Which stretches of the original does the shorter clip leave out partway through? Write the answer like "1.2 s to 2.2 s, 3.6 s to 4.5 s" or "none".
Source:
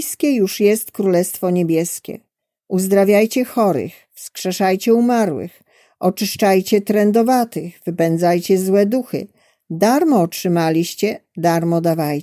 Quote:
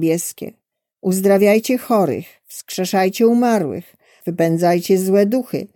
5.9 s to 7.8 s